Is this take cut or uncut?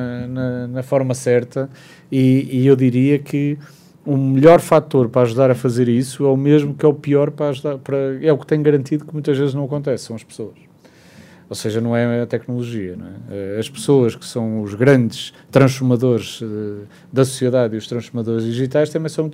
uncut